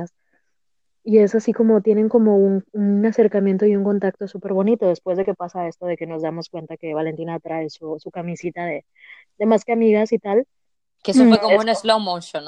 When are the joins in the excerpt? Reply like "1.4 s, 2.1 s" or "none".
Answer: none